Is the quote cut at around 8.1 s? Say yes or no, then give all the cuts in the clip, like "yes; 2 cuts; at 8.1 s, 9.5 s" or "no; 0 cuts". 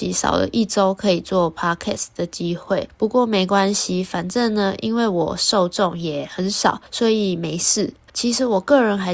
yes; 1 cut; at 8.1 s